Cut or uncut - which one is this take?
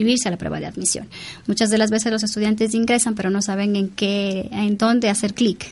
uncut